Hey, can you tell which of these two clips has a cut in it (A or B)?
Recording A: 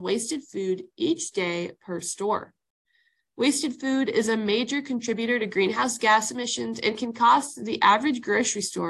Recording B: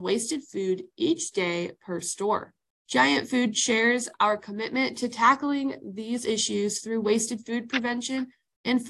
B